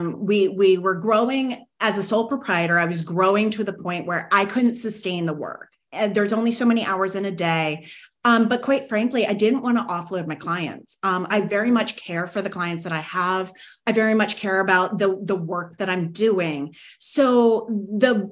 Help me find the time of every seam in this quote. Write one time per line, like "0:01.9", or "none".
0:11.3